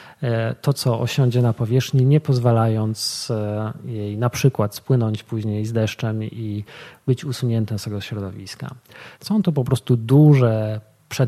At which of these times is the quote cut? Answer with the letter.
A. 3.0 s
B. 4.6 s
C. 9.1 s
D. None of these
C